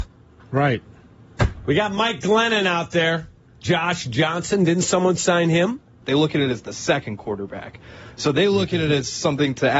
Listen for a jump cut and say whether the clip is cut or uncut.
cut